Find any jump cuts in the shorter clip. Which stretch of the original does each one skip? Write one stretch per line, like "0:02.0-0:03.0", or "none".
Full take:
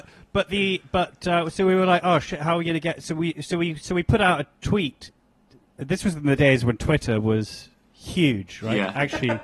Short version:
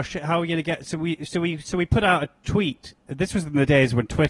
0:05.2-0:05.7